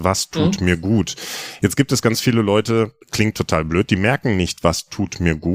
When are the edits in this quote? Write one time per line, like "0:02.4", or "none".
0:03.0